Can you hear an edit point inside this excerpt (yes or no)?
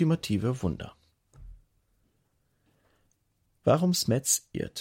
no